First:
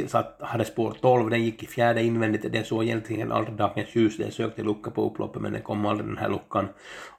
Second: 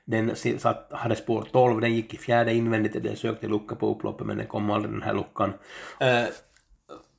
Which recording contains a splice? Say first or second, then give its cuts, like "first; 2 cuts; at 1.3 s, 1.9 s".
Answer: second; 2 cuts; at 3.0 s, 6.0 s